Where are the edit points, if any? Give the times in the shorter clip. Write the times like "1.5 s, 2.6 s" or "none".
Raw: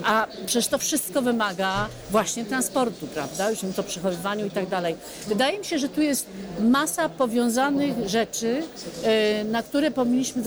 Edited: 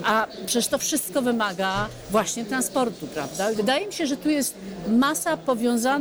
3.5 s